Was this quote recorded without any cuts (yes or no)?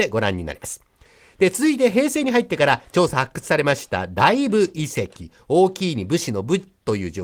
yes